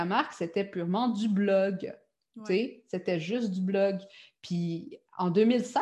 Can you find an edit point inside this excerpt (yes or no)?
no